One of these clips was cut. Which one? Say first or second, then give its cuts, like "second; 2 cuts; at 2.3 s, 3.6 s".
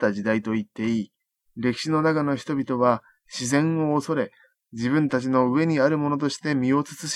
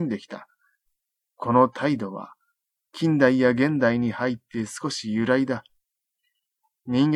first; 2 cuts; at 1.4 s, 4.5 s